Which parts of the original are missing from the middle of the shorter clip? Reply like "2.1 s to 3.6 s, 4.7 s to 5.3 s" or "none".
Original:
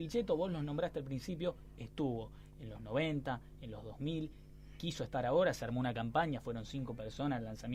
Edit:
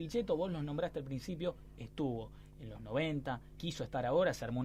3.6 s to 4.8 s